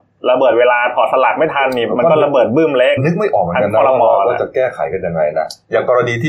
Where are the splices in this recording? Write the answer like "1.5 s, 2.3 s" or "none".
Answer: 3.0 s